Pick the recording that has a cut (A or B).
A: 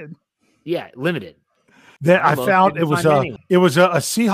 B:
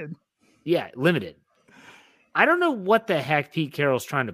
A